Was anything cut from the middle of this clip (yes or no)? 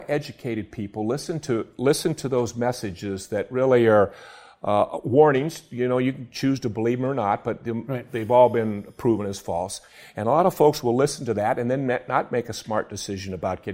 no